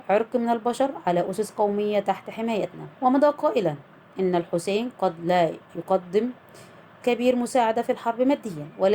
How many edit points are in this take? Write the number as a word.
one